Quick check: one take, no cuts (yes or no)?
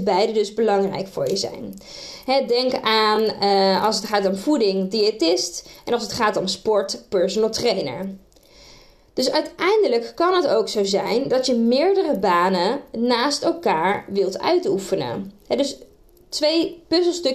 yes